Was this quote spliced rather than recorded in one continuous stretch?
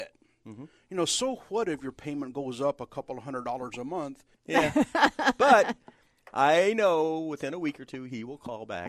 yes; 1 cut; at 4.3 s

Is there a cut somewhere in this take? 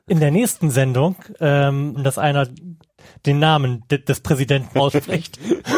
yes; 2 cuts; at 2.0 s, 4.7 s

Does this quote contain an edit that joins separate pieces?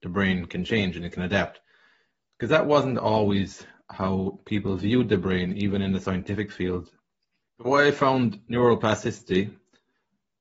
yes; 1 cut; at 7.4 s

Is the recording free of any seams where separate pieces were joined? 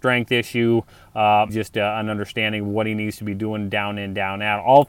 no; 1 cut; at 1.5 s

